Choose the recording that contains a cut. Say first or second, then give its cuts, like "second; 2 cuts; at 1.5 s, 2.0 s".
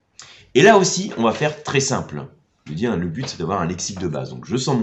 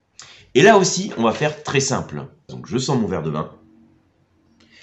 second; 1 cut; at 2.5 s